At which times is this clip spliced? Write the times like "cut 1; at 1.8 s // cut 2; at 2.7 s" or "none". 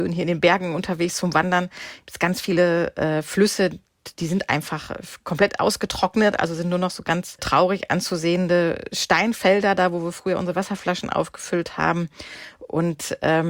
none